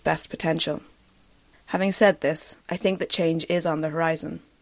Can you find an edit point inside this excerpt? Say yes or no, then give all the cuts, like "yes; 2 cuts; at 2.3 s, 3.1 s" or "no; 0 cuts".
yes; 2 cuts; at 1.5 s, 2.6 s